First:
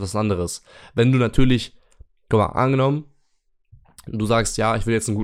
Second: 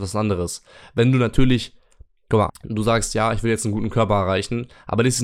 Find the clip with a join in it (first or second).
second